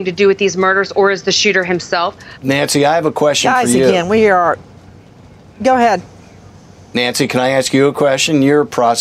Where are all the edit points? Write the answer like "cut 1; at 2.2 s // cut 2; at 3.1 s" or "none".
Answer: cut 1; at 2.3 s